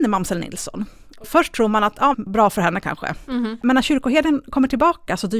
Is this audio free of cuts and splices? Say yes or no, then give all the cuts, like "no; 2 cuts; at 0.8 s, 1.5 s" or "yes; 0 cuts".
no; 1 cut; at 2.1 s